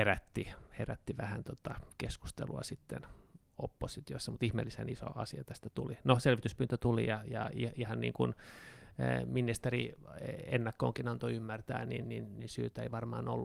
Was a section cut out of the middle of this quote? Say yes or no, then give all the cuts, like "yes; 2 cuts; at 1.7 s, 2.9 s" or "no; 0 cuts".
no; 0 cuts